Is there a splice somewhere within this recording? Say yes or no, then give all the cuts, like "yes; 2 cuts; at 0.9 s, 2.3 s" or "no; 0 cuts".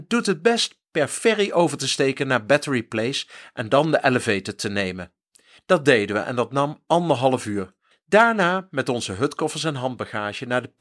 yes; 2 cuts; at 5.6 s, 7.9 s